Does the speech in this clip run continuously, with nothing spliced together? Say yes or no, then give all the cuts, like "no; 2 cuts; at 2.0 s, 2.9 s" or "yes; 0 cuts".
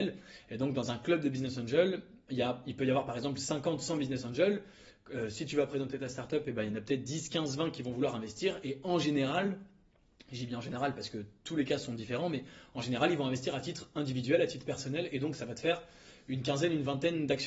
yes; 0 cuts